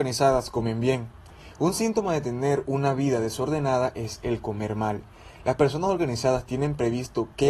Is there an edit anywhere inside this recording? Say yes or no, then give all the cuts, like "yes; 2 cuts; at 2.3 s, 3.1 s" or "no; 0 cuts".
no; 0 cuts